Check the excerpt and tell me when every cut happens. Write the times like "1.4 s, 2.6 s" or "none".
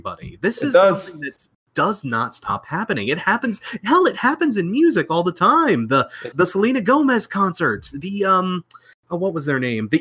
6.3 s